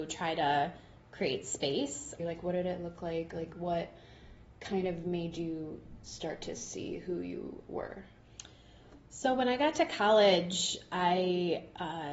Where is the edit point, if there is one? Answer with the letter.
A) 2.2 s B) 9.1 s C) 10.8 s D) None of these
A